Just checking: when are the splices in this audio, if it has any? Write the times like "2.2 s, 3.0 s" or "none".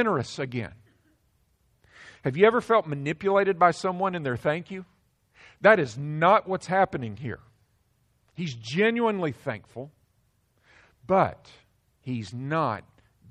none